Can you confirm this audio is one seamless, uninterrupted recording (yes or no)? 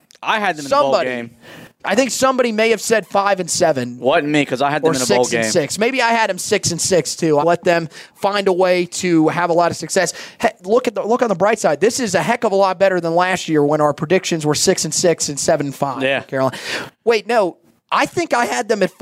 no